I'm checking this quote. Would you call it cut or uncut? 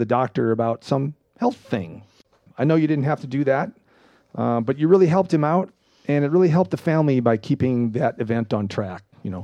cut